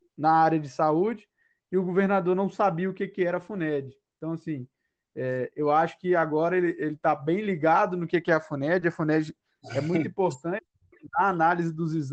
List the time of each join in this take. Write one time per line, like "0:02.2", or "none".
none